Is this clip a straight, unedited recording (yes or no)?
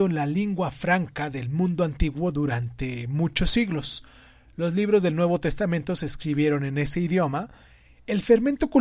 yes